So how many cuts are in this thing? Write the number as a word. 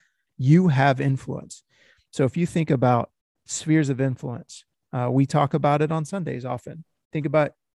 zero